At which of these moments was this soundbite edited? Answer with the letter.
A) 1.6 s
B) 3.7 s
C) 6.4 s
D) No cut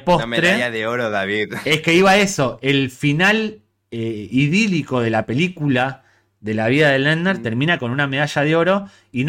D